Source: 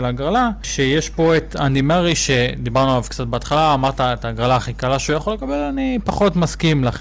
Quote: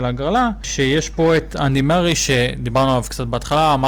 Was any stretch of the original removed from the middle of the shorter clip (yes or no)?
no